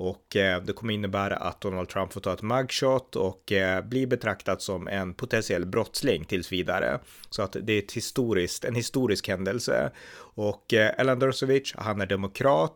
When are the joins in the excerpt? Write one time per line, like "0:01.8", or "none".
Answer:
none